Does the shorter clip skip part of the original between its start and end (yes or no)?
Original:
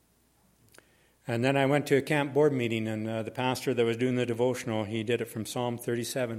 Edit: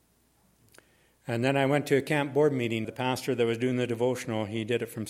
yes